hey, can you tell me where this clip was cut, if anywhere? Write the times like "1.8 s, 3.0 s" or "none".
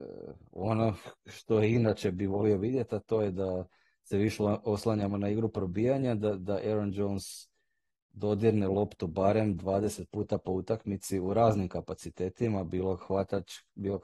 none